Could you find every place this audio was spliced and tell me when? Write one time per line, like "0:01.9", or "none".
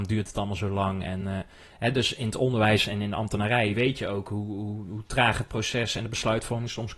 none